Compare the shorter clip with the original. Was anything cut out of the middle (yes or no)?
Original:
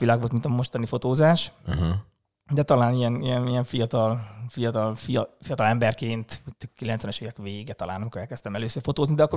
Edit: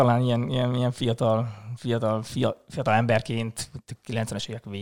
no